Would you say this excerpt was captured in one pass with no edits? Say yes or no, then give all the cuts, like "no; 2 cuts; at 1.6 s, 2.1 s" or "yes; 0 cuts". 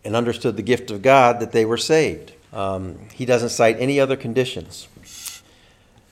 no; 1 cut; at 2.4 s